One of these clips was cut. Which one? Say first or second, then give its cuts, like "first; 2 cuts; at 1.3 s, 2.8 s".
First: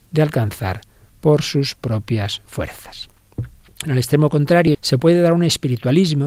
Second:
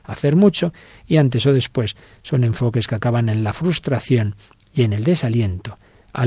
first; 1 cut; at 4.7 s